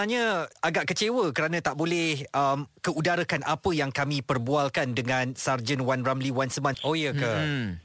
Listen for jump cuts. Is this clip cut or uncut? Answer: cut